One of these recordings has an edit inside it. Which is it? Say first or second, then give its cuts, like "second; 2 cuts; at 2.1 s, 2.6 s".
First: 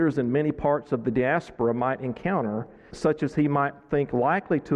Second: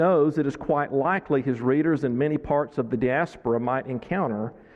first; 1 cut; at 2.9 s